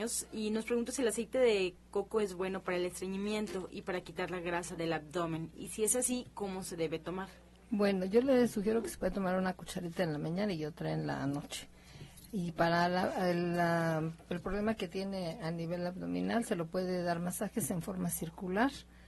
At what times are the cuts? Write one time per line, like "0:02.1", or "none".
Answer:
none